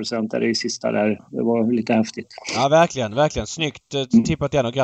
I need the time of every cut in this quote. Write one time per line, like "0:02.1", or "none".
none